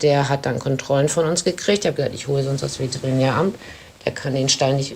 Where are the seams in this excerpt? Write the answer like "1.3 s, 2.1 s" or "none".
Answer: none